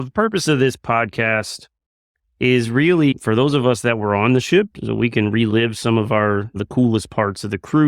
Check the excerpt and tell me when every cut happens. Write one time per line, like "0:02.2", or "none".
none